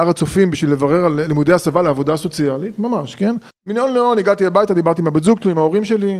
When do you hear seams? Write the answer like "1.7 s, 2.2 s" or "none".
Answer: 3.5 s